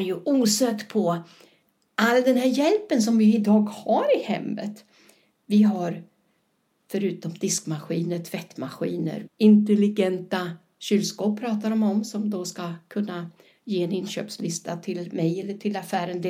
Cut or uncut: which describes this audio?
cut